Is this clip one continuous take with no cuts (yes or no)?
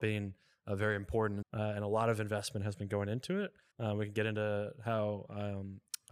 no